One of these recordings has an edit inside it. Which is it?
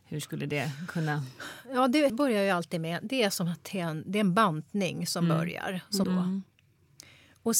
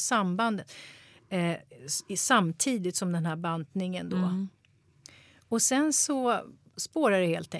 first; 2 cuts; at 2.1 s, 6.0 s

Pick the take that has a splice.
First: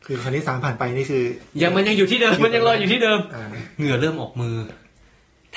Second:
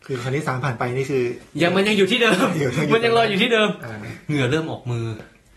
first; 1 cut; at 2.4 s

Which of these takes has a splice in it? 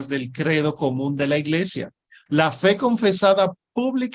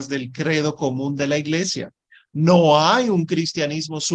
first; 1 cut; at 2.3 s

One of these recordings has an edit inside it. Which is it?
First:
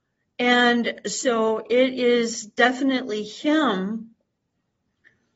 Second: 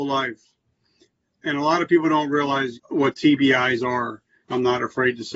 second; 2 cuts; at 2.7 s, 4.4 s

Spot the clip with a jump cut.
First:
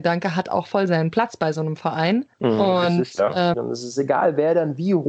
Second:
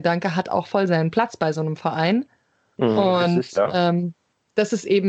first; 2 cuts; at 2.3 s, 3.5 s

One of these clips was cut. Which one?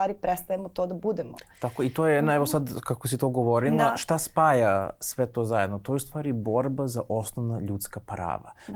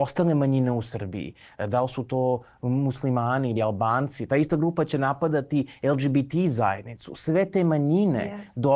second; 1 cut; at 3.6 s

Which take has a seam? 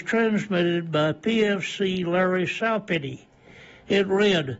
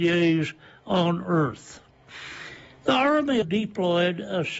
second; 1 cut; at 3.4 s

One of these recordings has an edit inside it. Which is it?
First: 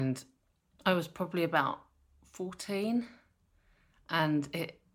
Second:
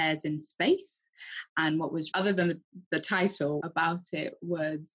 second; 2 cuts; at 2.1 s, 3.6 s

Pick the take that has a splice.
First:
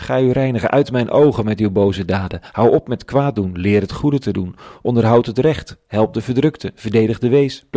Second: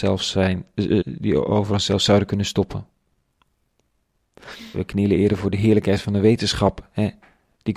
second; 2 cuts; at 1.0 s, 4.7 s

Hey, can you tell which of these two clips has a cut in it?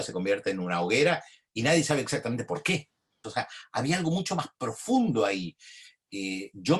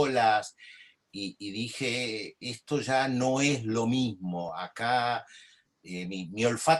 first; 1 cut; at 3.2 s

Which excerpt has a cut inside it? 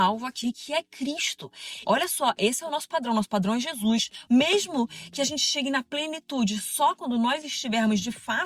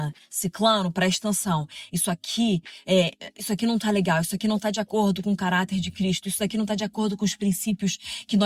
first; 2 cuts; at 1.8 s, 4.3 s

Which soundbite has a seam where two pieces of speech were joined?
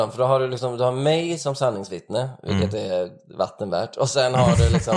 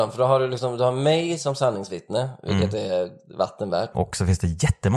second; 1 cut; at 3.9 s

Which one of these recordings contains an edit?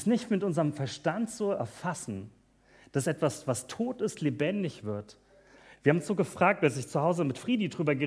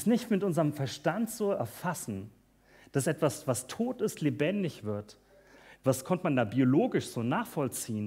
second; 1 cut; at 5.8 s

